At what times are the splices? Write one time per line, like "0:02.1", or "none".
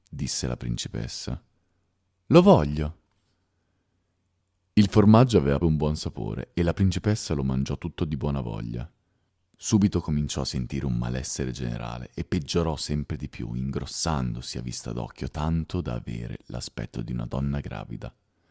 0:05.6
0:09.4